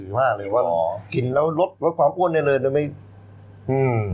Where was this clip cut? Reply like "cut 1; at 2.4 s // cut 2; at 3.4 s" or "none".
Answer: cut 1; at 1.7 s